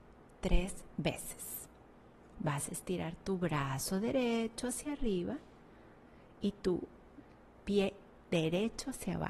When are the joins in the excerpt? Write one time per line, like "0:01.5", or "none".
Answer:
0:02.3